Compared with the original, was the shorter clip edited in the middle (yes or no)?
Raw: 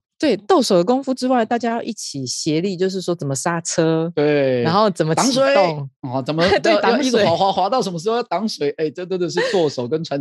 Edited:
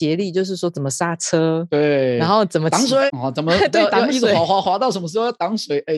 yes